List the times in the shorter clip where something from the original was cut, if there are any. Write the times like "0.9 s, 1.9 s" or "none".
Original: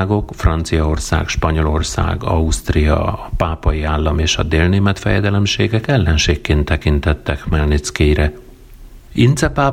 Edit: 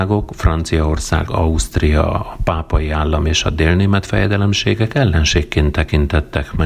1.3 s